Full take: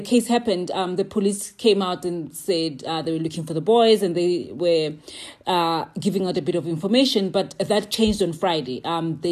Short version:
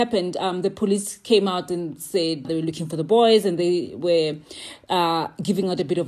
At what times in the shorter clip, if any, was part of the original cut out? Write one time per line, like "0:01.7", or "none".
0:02.4